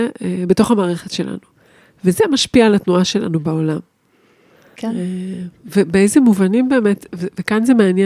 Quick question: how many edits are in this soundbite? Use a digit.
1